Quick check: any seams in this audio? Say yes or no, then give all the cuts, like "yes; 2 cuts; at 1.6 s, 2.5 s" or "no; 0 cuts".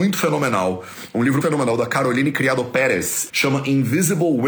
yes; 2 cuts; at 1.4 s, 3.3 s